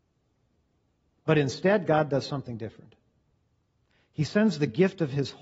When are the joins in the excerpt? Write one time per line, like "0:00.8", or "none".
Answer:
0:01.2